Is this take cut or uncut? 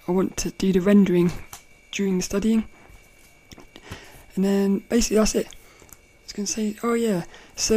cut